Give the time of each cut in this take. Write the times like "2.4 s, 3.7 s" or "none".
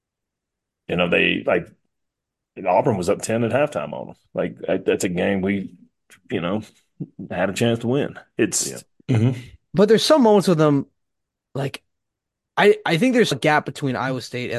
9.0 s, 13.3 s